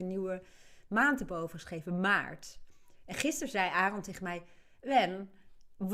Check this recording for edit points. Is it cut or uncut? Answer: uncut